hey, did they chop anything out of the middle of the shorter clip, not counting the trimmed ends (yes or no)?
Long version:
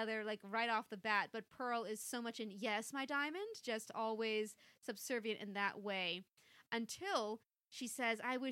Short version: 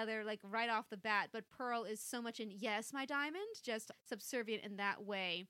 yes